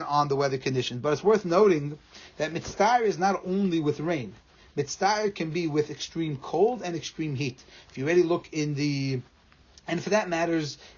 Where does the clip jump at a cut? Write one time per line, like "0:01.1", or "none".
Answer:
none